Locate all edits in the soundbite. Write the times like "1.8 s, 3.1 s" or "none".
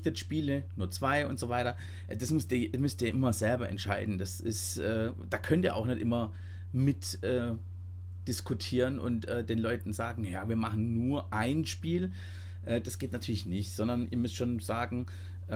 none